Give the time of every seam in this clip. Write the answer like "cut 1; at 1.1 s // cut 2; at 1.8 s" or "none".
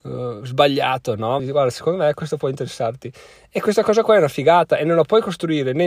cut 1; at 1.4 s